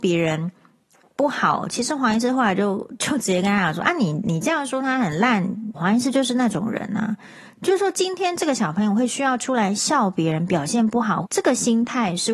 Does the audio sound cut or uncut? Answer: cut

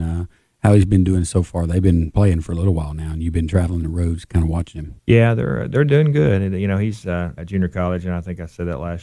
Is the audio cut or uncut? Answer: cut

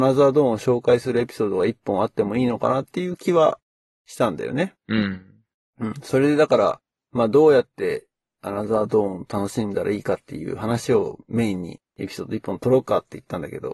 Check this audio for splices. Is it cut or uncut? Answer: uncut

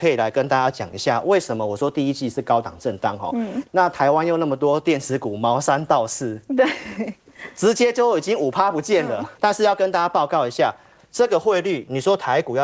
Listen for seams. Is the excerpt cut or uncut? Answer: cut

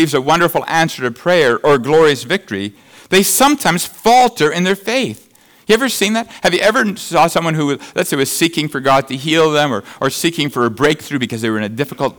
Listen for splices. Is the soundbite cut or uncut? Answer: uncut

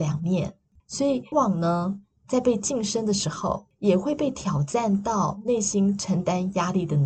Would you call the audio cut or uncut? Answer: cut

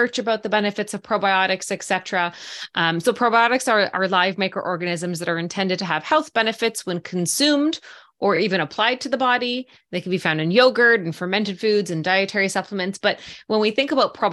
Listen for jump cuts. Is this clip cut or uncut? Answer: uncut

